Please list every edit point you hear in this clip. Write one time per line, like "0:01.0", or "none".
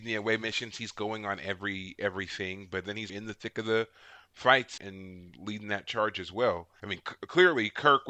0:03.1
0:04.8
0:06.8

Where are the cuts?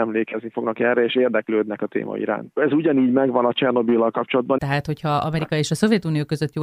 0:02.5
0:04.6

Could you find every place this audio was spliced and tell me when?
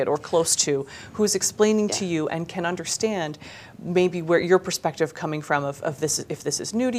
none

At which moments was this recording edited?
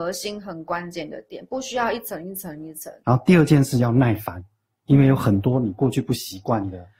0:03.0

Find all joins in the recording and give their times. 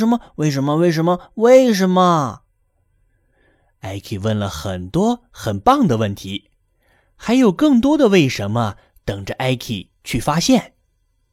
none

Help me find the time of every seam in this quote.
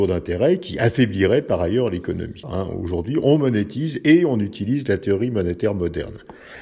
0:02.4

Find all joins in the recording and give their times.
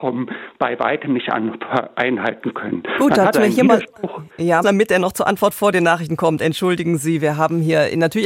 0:03.3
0:04.6

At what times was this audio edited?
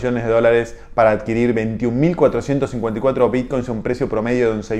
none

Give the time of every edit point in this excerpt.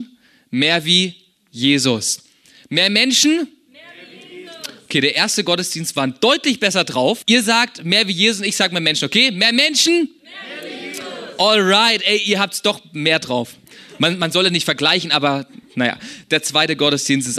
0:07.2

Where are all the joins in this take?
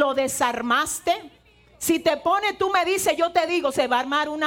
none

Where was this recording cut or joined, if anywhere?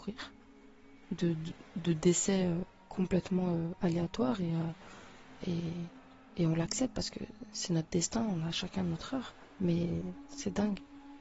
0:01.0

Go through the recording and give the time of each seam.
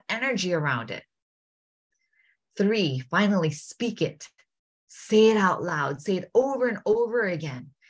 none

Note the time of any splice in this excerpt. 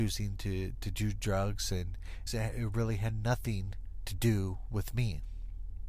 0:02.3

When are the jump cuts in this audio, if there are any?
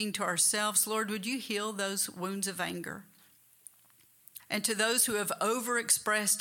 0:04.4

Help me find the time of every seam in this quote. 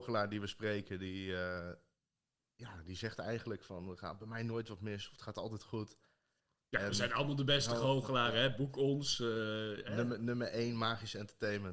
none

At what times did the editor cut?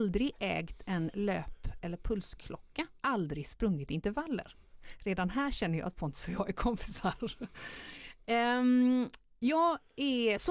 0:03.0

